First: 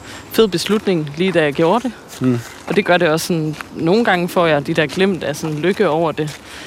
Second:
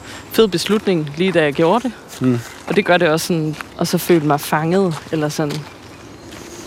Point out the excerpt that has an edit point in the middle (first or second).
second